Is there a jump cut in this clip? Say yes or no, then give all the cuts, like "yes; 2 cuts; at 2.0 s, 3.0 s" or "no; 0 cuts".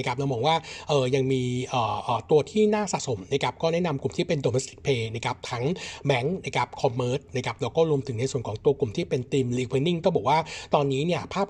no; 0 cuts